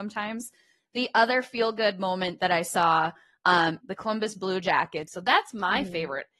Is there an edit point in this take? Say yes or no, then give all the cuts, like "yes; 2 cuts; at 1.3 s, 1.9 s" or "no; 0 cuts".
yes; 2 cuts; at 3.8 s, 5.1 s